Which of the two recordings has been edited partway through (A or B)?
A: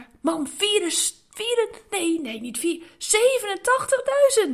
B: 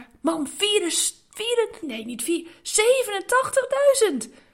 B